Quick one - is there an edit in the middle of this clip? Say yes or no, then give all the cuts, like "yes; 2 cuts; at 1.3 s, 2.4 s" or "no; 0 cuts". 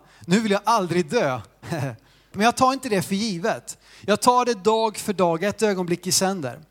yes; 1 cut; at 2.3 s